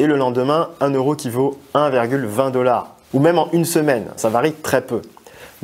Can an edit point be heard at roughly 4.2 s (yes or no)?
yes